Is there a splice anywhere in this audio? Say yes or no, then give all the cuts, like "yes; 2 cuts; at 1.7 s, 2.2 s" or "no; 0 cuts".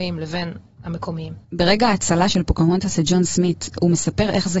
yes; 1 cut; at 1.4 s